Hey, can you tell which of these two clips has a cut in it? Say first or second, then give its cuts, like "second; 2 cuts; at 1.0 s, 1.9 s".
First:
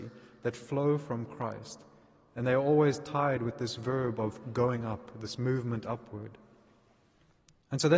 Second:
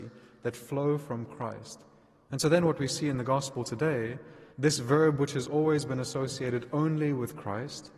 second; 2 cuts; at 2.3 s, 4.5 s